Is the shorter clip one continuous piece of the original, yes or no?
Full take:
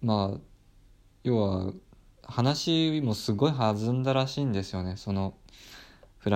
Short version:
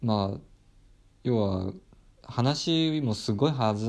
yes